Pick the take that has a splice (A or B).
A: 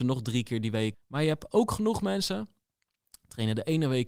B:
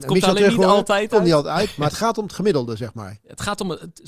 A